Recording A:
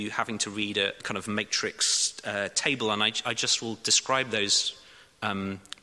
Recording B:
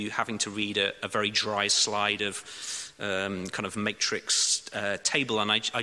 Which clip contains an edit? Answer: A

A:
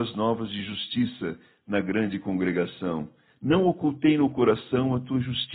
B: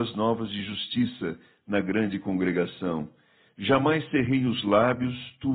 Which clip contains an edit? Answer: A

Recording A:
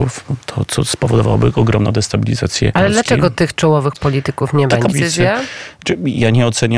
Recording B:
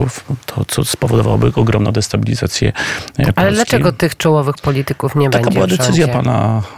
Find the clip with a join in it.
A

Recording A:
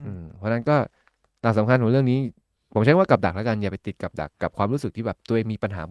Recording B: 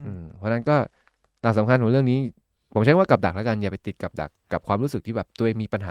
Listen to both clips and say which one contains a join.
A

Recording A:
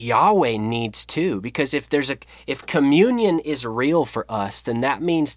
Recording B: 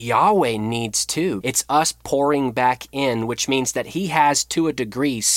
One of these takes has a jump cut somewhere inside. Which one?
B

